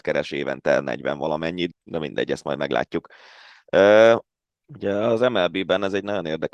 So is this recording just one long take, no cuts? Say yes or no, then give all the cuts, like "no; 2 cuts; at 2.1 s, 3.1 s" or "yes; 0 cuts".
no; 2 cuts; at 1.7 s, 4.4 s